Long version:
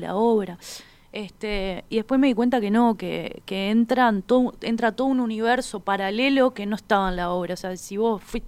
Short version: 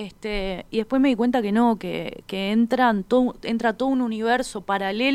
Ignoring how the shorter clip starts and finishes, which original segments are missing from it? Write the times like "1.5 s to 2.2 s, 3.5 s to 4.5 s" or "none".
none